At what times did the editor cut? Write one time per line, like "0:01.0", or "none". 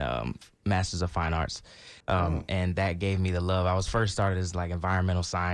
0:02.0